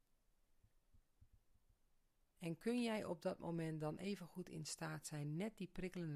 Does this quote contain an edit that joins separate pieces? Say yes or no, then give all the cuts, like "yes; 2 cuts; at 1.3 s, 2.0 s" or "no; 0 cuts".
no; 0 cuts